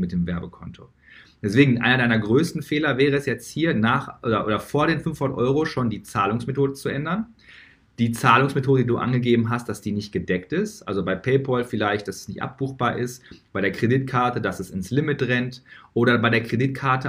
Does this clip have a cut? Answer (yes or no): no